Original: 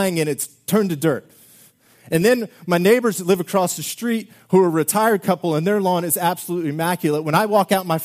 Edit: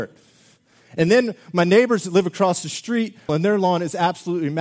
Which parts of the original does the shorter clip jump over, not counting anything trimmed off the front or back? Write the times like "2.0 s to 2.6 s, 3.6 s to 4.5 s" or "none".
4.4 s to 5.5 s